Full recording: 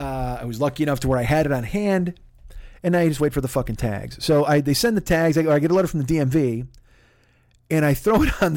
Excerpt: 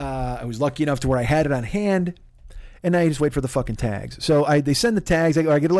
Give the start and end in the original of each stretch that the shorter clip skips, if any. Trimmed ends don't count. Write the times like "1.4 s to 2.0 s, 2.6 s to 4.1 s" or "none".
none